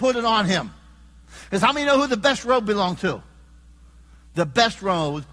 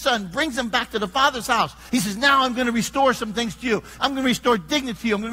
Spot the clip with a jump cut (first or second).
second